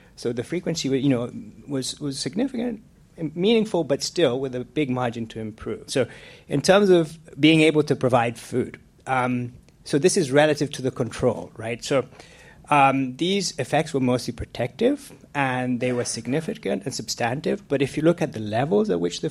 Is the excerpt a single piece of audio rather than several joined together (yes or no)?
no